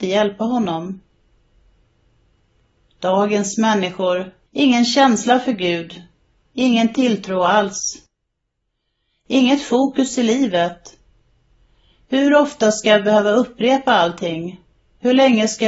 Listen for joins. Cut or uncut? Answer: cut